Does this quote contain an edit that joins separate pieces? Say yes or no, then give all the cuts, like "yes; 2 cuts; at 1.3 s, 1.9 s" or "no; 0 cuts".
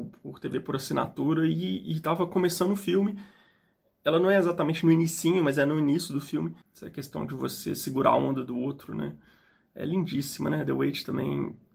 yes; 1 cut; at 6.6 s